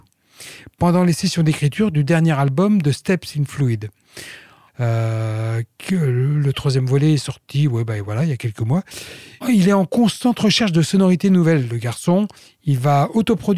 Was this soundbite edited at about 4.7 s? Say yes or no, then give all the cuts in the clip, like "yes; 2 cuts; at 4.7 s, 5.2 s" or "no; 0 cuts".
yes; 2 cuts; at 4.7 s, 9.4 s